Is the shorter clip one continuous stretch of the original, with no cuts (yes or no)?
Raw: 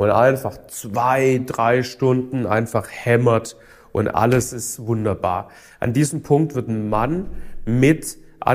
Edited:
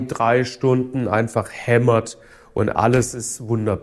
yes